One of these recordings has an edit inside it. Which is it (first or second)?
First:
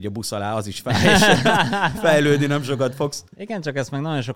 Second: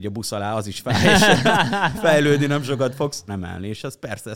second